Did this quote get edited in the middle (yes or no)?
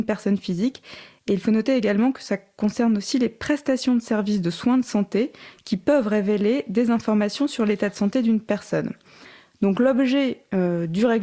no